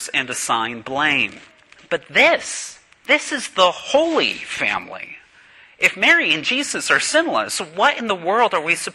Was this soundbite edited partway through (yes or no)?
no